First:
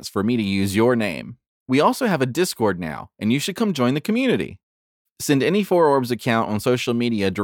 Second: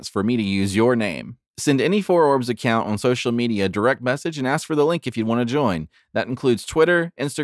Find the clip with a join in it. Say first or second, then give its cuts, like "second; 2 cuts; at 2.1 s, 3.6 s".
second; 1 cut; at 1.5 s